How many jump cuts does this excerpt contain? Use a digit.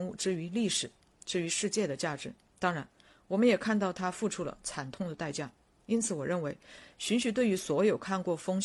0